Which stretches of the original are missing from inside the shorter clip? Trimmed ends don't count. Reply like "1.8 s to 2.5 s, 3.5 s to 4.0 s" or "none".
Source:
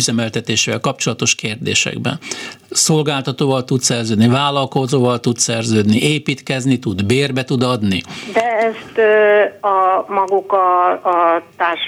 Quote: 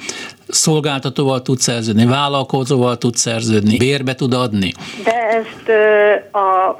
6.0 s to 7.1 s